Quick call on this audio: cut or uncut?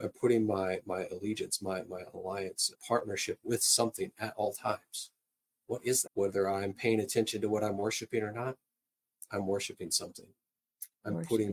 cut